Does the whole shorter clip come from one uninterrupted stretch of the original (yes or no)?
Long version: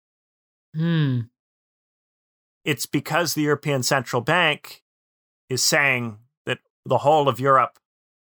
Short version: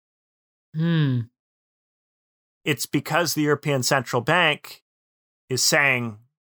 yes